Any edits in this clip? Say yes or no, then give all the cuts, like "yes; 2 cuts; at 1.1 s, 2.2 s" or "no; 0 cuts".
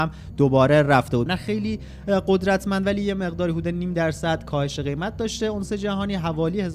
yes; 1 cut; at 1.3 s